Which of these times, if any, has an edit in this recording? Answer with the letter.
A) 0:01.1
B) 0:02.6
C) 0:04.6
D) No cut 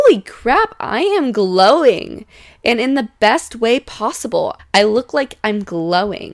C